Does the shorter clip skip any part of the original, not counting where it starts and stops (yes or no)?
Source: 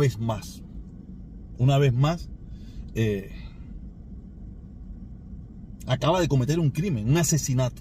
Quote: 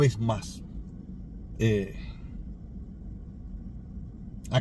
yes